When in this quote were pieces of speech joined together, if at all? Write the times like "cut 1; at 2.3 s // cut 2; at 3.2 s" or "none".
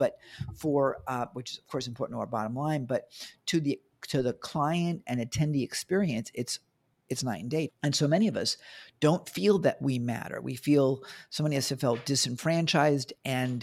cut 1; at 7.7 s